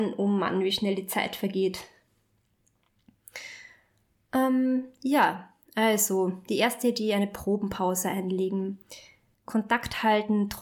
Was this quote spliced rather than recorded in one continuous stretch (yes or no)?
yes